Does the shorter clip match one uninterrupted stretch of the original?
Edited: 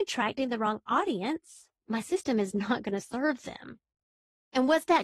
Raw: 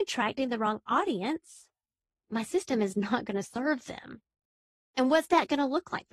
no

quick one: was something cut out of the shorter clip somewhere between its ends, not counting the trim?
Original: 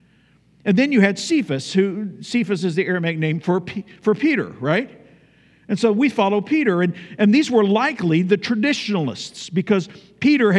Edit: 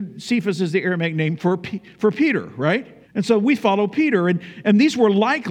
yes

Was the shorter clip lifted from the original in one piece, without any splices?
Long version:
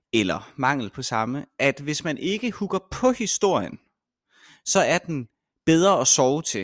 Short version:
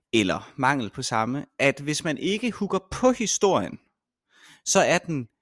yes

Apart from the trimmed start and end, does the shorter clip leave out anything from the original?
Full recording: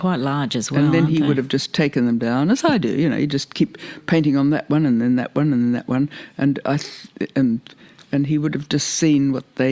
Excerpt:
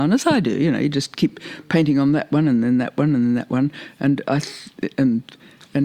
no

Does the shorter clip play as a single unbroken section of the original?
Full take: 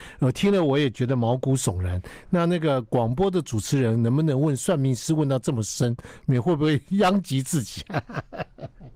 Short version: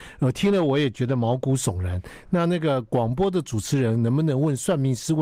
yes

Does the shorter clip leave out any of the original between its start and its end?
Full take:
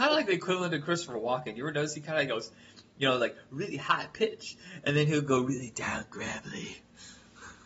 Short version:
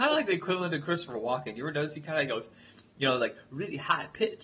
no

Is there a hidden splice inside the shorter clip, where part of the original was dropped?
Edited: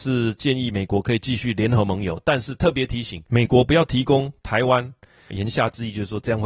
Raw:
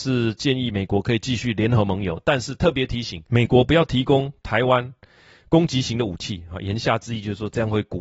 yes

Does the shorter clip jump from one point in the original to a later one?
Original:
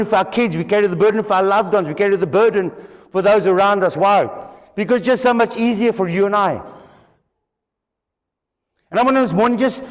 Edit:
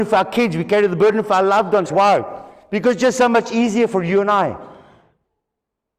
yes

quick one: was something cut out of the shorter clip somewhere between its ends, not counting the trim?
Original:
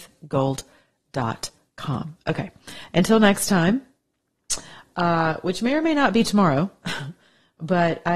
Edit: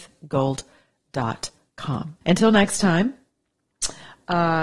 yes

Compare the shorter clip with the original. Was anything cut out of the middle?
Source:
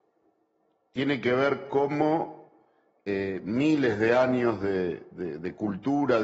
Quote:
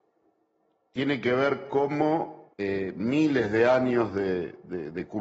yes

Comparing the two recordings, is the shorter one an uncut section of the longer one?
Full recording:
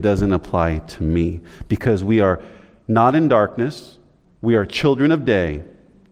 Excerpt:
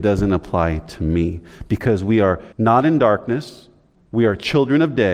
no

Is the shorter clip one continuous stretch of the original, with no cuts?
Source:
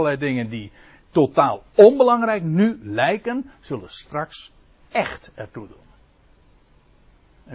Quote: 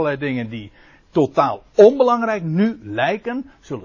yes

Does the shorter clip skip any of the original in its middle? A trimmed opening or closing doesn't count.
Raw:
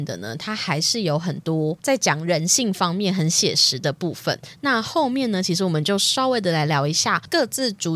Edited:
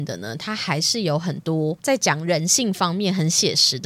no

